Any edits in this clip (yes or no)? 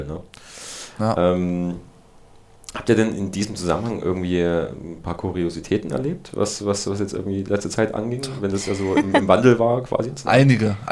no